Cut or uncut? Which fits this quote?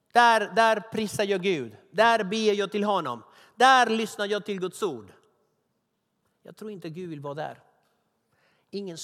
uncut